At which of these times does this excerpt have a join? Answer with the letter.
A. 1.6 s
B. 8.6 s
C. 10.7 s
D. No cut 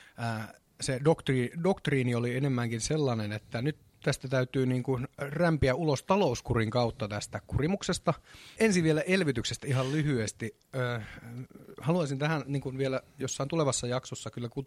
B